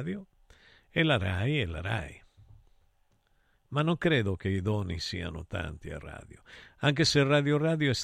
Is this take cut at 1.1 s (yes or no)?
no